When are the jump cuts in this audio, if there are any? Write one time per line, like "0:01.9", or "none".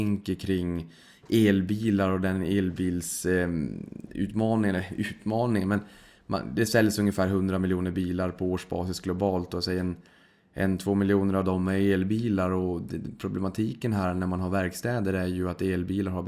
0:04.1

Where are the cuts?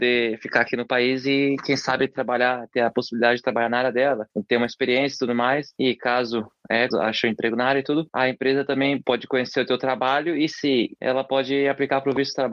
0:06.9
0:11.0

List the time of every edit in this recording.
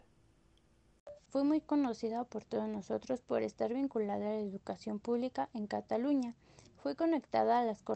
0:01.3

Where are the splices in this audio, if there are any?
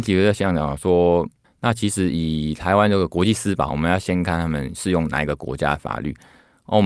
0:01.4
0:03.7

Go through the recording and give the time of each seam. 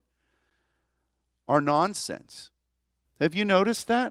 0:03.0

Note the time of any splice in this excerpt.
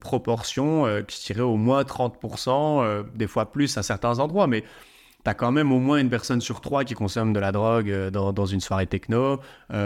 none

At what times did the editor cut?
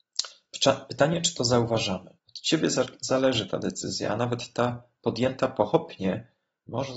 0:02.2

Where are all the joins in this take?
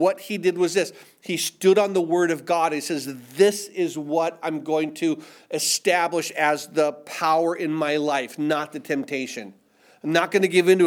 none

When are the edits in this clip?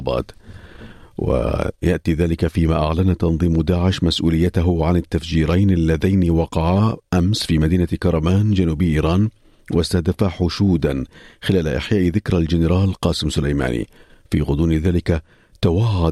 none

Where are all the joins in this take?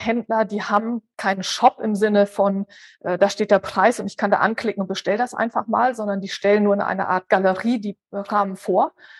none

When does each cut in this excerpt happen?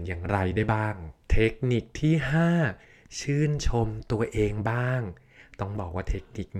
0:01.2

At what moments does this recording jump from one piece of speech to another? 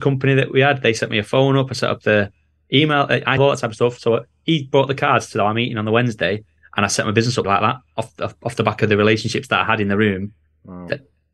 0:03.4
0:07.4

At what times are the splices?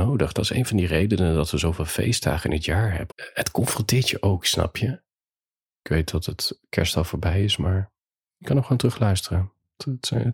0:03.1
0:05.6

